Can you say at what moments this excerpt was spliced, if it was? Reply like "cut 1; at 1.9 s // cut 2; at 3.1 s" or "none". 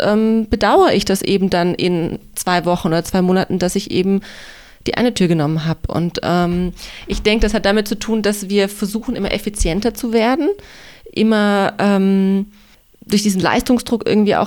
none